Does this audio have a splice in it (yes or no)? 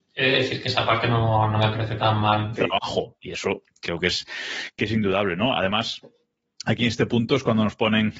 yes